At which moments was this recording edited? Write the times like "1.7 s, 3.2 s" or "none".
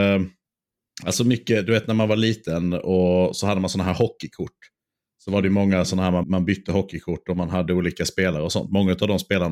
6.2 s